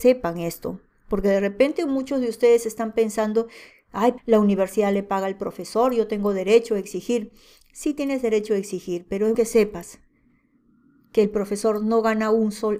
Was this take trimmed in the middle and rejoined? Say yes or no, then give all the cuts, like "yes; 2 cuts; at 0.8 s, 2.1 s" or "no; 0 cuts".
yes; 2 cuts; at 4.2 s, 9.3 s